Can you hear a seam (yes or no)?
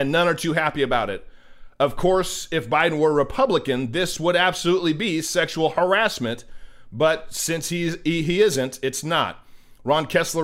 no